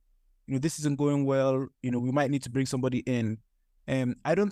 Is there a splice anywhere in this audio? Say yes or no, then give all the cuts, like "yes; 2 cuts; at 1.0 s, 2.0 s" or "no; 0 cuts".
no; 0 cuts